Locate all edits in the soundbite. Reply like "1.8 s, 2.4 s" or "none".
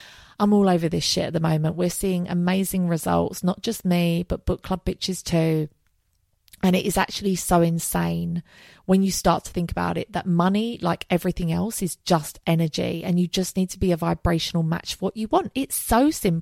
none